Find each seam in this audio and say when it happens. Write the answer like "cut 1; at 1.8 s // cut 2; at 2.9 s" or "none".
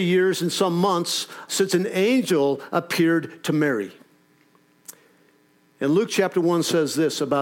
cut 1; at 1.5 s